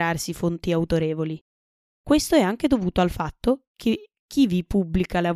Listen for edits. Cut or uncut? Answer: uncut